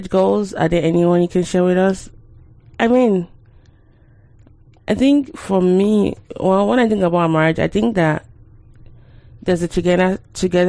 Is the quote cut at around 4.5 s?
no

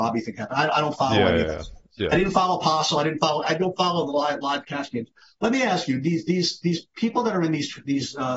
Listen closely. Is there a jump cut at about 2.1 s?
no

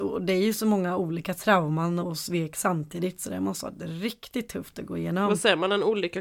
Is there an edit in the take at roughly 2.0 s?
yes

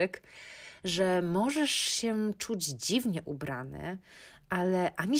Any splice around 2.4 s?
no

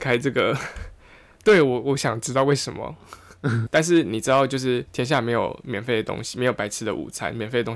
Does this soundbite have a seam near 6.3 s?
no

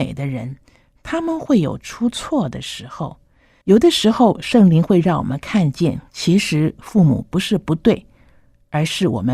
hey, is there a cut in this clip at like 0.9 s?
no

